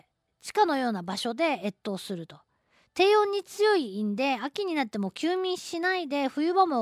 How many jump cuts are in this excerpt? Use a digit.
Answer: 0